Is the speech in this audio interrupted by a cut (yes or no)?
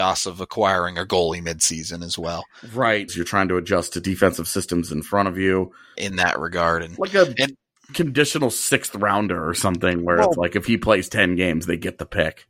yes